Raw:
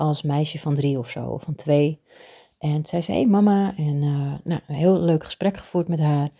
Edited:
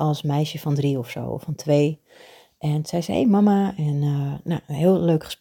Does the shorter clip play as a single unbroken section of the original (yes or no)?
yes